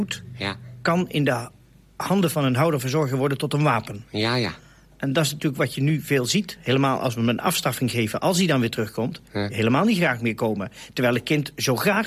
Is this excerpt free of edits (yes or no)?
no